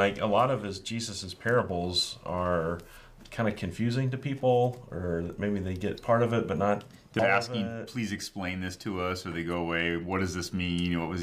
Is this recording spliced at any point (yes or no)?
yes